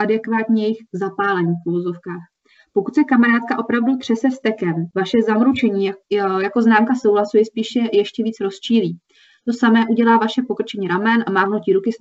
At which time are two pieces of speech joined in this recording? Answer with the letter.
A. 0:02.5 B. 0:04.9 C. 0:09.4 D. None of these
D